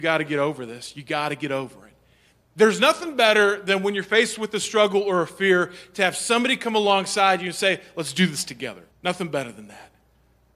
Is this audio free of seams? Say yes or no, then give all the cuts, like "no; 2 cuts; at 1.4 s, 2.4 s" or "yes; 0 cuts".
no; 1 cut; at 8.9 s